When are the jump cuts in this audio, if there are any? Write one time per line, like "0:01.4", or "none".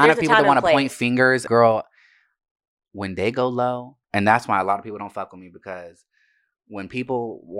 0:01.5
0:04.0